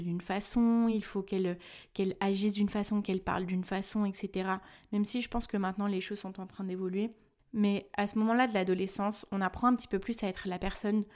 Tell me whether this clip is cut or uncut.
uncut